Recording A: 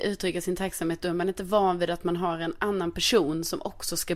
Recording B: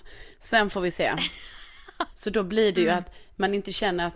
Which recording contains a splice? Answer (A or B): B